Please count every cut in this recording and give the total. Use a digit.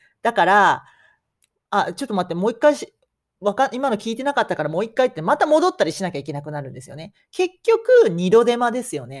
0